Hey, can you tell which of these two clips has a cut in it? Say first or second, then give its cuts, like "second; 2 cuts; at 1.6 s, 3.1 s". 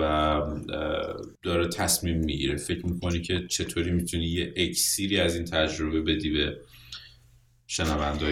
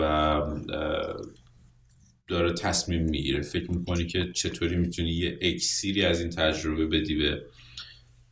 first; 1 cut; at 1.4 s